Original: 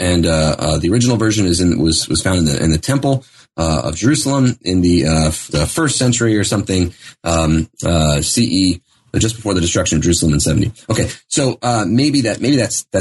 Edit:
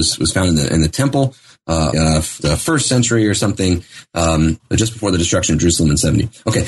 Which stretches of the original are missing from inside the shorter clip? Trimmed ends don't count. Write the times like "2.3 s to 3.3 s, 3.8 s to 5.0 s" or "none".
3.8 s to 5.0 s, 7.7 s to 9.0 s